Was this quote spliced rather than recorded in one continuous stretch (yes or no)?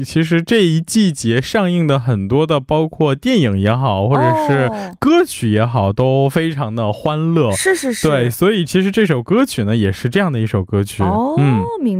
no